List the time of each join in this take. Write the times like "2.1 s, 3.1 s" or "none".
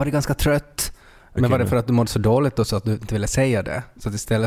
1.4 s